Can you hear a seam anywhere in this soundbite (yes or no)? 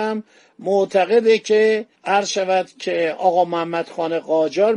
yes